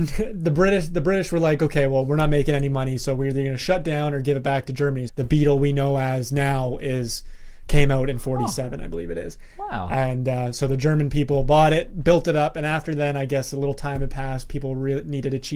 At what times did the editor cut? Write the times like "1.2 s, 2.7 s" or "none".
5.1 s